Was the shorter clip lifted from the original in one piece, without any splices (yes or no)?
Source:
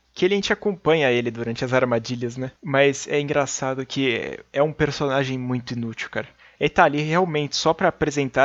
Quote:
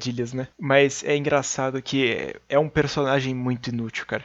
yes